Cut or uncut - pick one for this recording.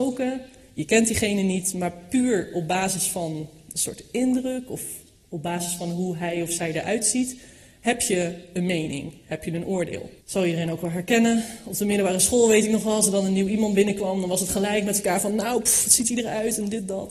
cut